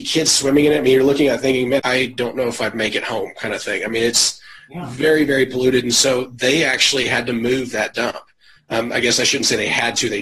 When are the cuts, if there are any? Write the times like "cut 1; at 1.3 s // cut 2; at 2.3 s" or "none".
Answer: cut 1; at 1.8 s